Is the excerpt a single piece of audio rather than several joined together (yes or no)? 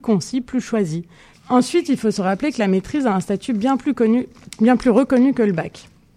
no